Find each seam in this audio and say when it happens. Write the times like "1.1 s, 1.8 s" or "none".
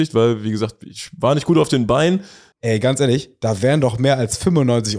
2.5 s